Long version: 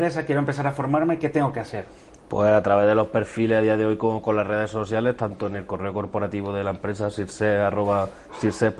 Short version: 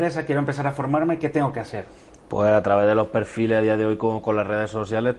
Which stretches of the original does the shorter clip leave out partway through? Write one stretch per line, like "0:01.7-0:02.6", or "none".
none